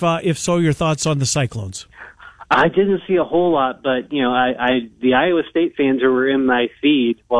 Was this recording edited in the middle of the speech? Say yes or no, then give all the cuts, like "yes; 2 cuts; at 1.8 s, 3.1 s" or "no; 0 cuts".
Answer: no; 0 cuts